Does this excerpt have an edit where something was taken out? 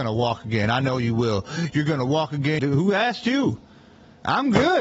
yes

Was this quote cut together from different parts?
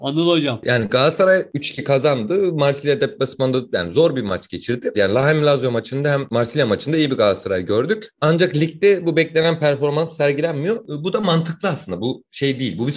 yes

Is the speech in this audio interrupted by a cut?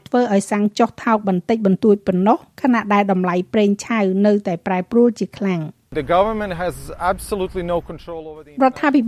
yes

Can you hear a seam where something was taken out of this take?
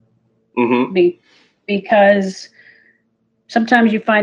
no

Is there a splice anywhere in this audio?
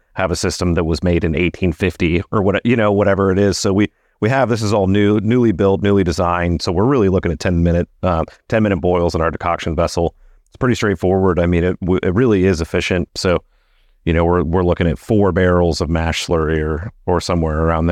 yes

